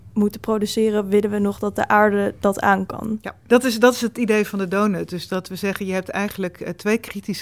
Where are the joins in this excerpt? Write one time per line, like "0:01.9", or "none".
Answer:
none